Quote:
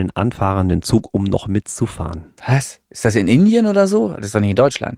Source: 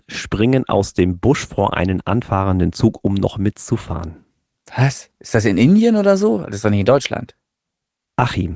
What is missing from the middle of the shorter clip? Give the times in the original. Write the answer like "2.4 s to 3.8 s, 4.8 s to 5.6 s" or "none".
4.3 s to 4.7 s